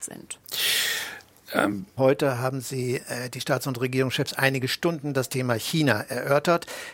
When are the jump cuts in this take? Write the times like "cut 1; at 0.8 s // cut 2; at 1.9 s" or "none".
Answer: cut 1; at 2.0 s